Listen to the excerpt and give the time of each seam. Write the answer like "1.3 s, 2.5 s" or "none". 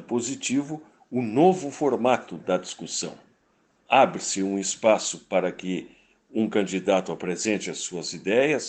none